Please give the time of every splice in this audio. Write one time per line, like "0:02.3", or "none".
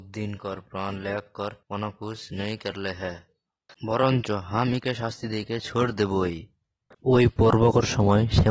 0:01.6